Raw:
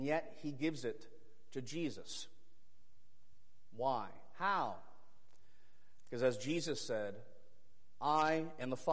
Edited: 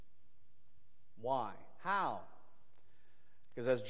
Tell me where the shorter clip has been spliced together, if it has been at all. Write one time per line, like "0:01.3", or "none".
none